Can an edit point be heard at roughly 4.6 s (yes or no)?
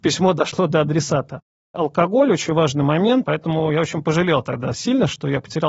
no